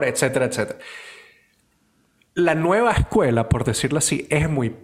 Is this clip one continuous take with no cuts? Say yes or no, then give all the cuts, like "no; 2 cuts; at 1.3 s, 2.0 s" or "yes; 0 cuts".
yes; 0 cuts